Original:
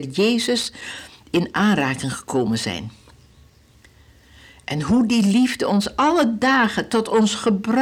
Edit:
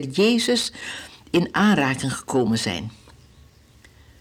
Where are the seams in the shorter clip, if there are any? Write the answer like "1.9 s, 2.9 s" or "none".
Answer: none